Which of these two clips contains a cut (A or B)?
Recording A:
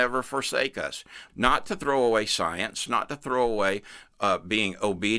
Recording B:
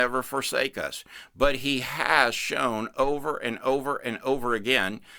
A